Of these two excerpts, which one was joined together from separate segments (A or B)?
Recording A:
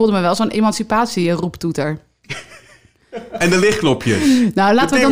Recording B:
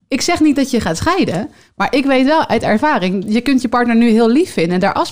A